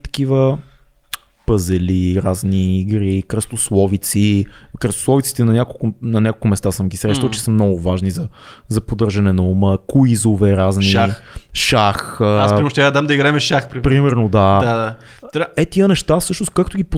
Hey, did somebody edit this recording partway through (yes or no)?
no